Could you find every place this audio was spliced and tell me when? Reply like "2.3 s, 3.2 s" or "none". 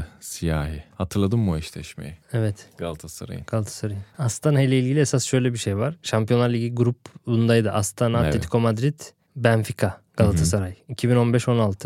4.1 s

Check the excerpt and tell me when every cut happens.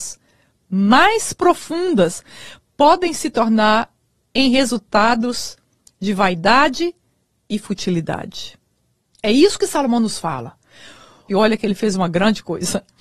9.1 s, 11.3 s

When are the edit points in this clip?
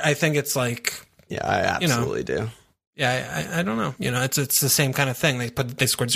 4.0 s

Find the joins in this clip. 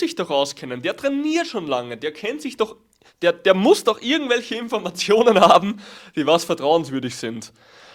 none

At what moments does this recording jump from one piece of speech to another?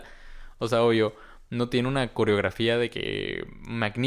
none

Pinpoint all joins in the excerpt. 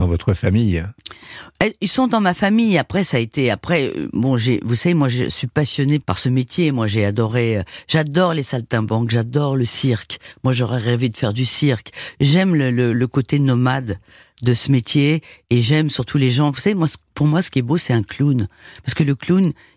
none

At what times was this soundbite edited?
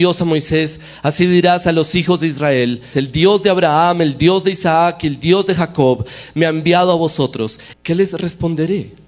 2.9 s, 7.7 s

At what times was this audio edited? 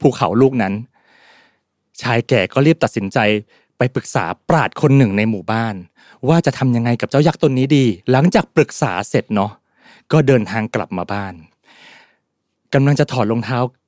8.0 s

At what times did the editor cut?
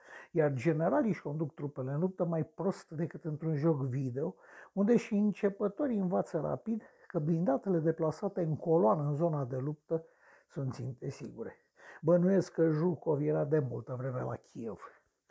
none

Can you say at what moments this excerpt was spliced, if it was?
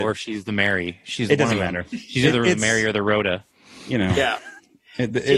none

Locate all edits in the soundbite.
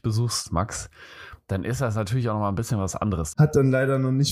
3.3 s

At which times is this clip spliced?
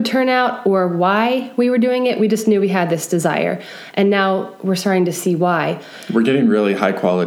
none

